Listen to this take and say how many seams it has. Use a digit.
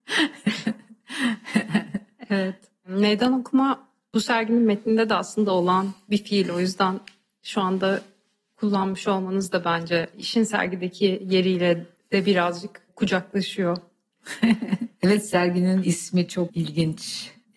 0